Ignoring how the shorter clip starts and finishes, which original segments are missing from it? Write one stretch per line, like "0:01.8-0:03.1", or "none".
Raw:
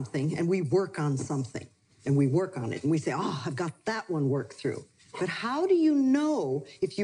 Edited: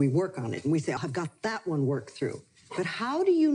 0:03.2-0:03.4